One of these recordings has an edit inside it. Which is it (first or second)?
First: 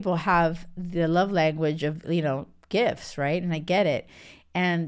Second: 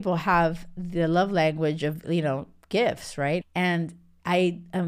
second